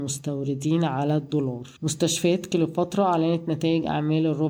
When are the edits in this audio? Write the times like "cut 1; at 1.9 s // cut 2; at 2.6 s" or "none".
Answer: cut 1; at 1.8 s